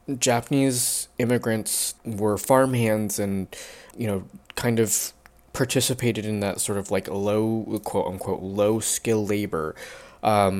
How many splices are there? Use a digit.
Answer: 2